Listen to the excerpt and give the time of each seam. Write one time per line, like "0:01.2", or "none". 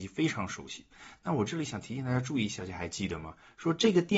0:02.6